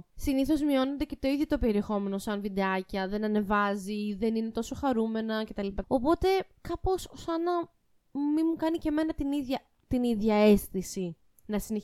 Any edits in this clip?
yes; 1 cut; at 5.8 s

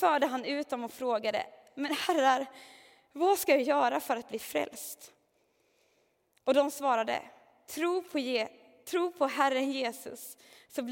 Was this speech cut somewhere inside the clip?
no; 0 cuts

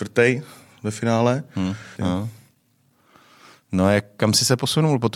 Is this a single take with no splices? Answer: no; 1 cut; at 2.0 s

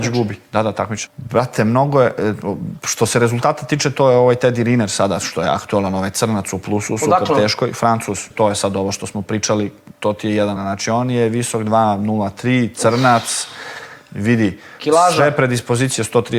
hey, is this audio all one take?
no; 3 cuts; at 1.1 s, 8.3 s, 10.6 s

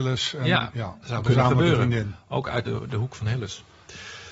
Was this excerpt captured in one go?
yes; 0 cuts

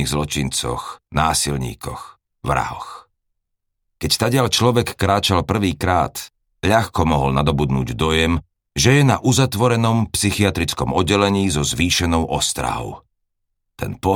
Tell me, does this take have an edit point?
no; 0 cuts

